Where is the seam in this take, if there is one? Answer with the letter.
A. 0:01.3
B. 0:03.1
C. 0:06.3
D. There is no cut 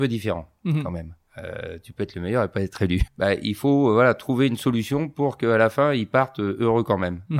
B